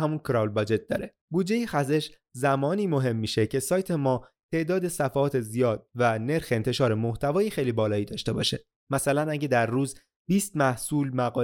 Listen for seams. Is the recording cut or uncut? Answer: cut